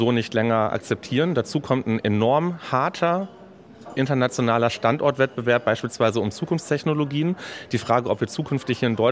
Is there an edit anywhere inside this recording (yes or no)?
no